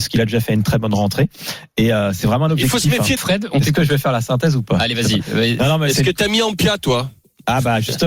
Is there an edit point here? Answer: yes; 1 cut; at 3.2 s

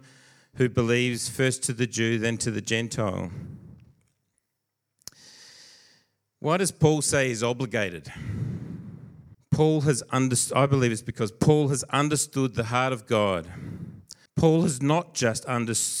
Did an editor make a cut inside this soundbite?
yes; 2 cuts; at 9.3 s, 14.3 s

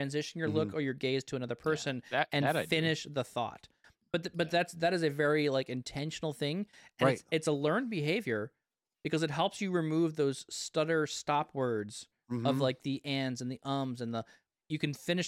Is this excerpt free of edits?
yes; 0 cuts

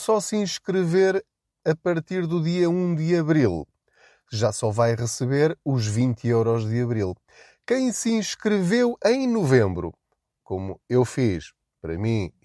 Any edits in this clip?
no; 0 cuts

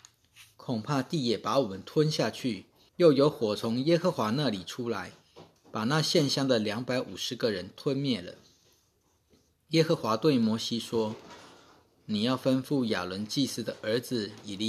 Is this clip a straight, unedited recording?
no; 1 cut; at 2.9 s

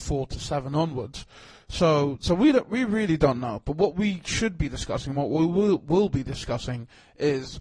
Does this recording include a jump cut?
no; 0 cuts

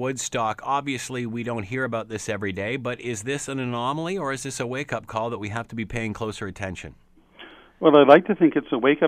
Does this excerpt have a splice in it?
no; 0 cuts

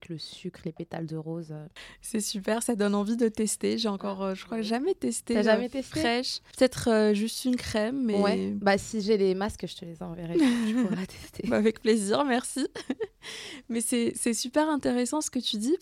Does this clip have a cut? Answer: no; 0 cuts

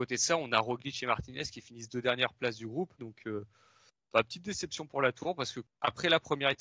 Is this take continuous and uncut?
no; 1 cut; at 3.0 s

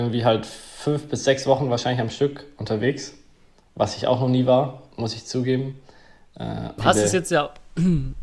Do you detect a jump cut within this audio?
yes; 1 cut; at 6.8 s

